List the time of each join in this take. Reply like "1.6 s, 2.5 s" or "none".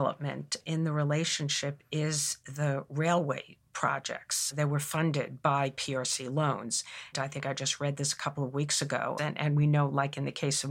7.1 s, 9.2 s